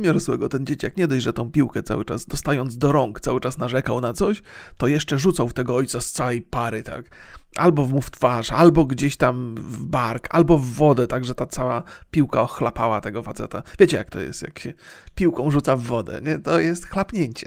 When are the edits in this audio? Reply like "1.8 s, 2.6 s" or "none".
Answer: none